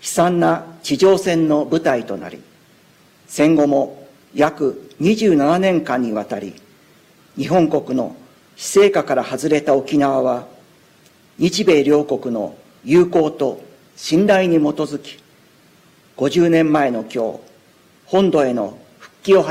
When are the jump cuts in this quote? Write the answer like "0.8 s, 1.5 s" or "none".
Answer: none